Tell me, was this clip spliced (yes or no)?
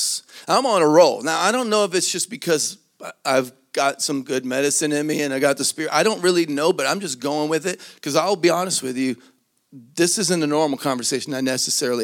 no